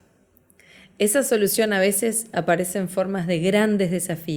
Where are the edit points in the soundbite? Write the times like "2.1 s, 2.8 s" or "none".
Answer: none